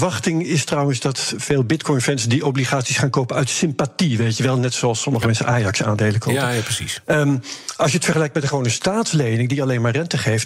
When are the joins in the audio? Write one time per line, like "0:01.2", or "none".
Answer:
none